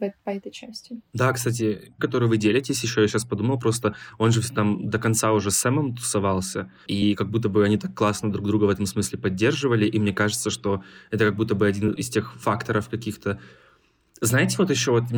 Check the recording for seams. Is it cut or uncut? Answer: cut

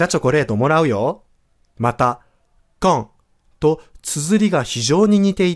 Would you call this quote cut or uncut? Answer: cut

